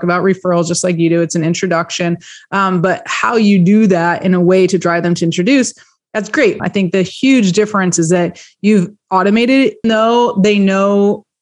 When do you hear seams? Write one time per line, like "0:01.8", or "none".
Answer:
0:06.6
0:09.8